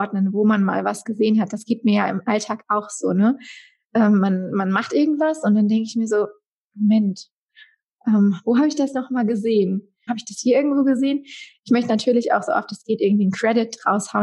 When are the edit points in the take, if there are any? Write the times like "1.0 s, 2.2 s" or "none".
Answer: 10.1 s